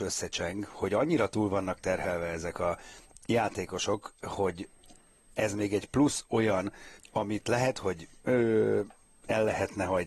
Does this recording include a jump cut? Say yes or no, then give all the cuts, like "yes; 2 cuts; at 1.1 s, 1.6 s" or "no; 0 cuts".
yes; 1 cut; at 7.0 s